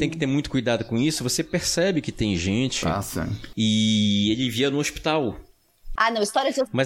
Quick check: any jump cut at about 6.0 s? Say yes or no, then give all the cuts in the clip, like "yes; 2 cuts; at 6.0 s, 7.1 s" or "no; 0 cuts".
yes; 2 cuts; at 3.5 s, 6.0 s